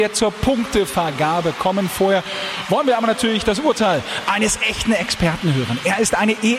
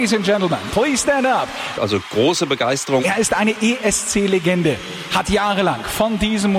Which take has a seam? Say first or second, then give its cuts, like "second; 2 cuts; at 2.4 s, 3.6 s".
second; 2 cuts; at 1.8 s, 3.0 s